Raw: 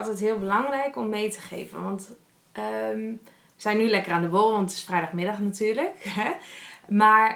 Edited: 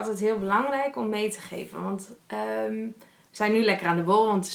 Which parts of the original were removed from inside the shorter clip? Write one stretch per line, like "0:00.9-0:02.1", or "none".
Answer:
0:02.2-0:02.5